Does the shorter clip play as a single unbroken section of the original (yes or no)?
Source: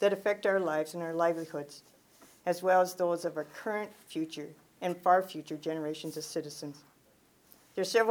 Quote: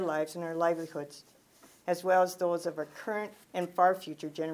no